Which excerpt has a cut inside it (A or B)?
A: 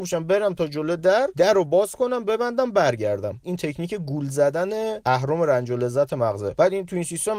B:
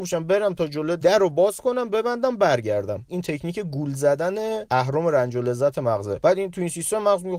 B